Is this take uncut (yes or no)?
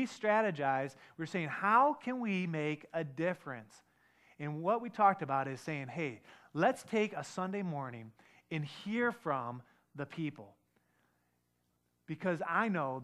yes